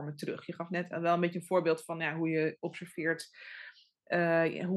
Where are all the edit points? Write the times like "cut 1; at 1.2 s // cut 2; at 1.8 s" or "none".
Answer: none